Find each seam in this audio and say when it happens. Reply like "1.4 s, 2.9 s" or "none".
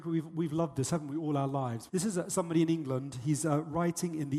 1.9 s